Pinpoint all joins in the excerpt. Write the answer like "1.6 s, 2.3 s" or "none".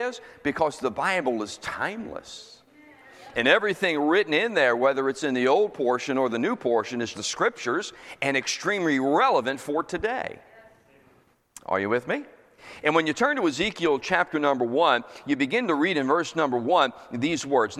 7.1 s